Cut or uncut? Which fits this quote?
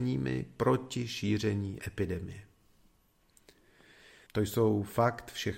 cut